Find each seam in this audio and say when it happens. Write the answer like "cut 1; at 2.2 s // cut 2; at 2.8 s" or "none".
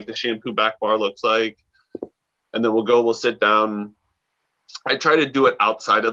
none